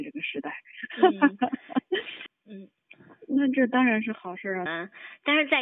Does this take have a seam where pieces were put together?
yes; 2 cuts; at 2.3 s, 4.7 s

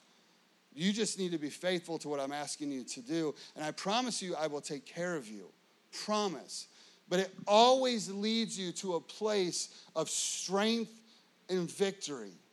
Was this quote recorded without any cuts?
yes; 0 cuts

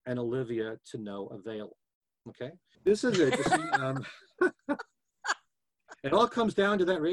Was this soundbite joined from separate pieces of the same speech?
yes; 1 cut; at 2.7 s

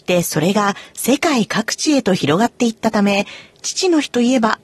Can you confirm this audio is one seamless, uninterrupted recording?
yes; 0 cuts

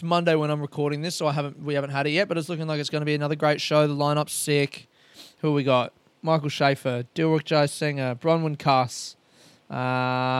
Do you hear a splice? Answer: no; 0 cuts

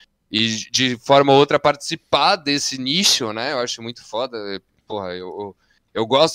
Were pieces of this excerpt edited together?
no; 0 cuts

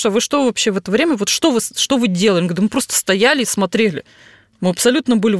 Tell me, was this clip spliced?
no; 0 cuts

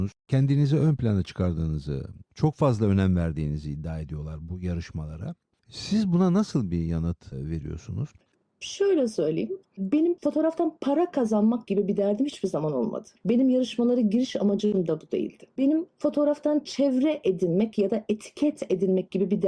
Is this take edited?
no; 0 cuts

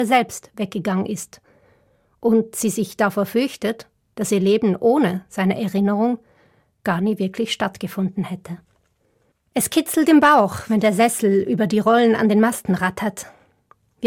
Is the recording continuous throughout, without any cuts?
no; 1 cut; at 9.3 s

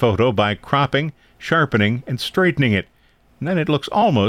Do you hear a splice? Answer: no; 0 cuts

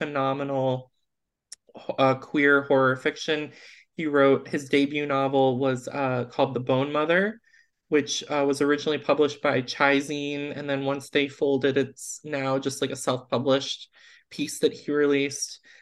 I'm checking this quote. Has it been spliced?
no; 0 cuts

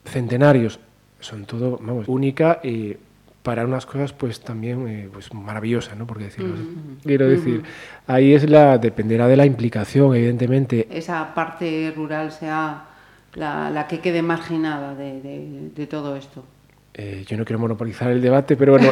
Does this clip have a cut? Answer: yes; 3 cuts; at 2.0 s, 7.0 s, 10.9 s

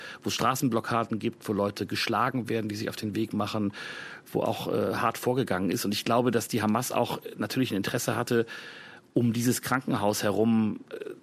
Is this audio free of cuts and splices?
yes; 0 cuts

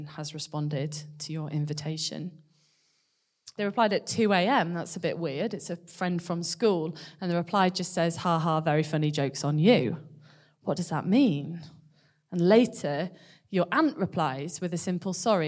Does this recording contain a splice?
yes; 1 cut; at 3.6 s

